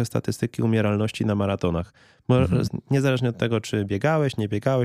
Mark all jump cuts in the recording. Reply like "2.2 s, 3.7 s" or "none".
2.7 s